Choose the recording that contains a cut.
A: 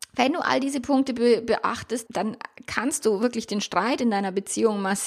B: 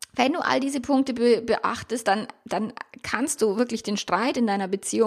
A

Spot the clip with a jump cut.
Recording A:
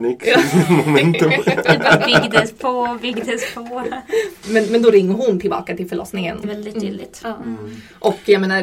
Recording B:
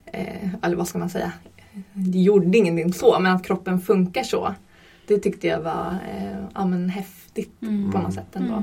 A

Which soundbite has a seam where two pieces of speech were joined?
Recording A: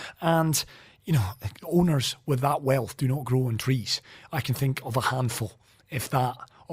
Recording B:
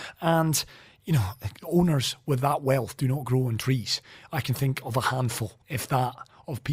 B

